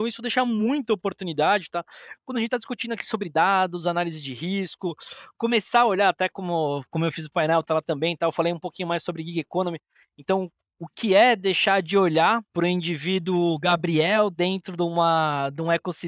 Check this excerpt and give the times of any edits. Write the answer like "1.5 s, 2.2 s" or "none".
12.5 s

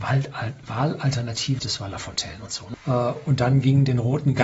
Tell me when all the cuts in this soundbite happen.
1.6 s, 2.7 s

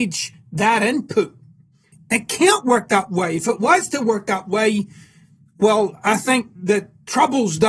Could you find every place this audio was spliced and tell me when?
1.9 s

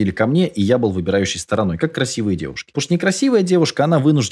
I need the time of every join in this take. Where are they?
none

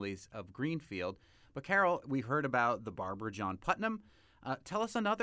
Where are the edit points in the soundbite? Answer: none

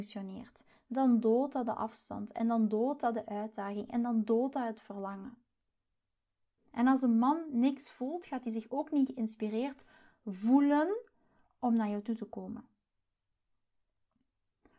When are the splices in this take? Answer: 6.6 s

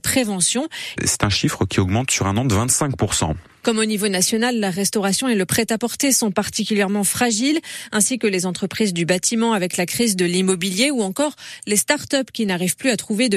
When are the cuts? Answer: 1.0 s

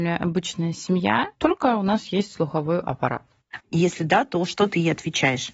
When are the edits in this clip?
1.3 s, 3.6 s

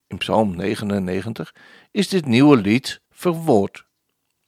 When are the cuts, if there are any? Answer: 3.1 s

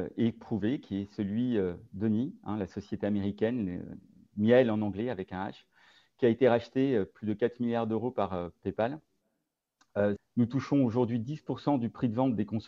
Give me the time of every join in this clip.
10.2 s

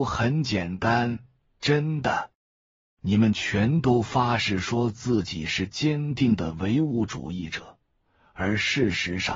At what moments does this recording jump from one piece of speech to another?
none

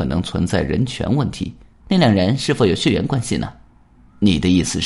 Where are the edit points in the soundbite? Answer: 1.8 s

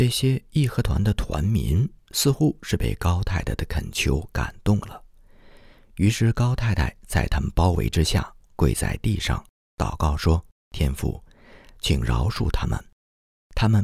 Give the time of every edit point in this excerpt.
none

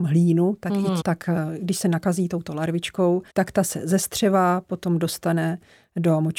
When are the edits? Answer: 1.0 s, 3.3 s

